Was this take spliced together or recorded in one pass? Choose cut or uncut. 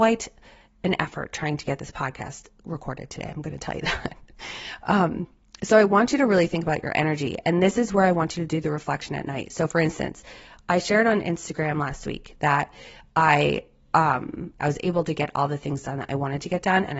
cut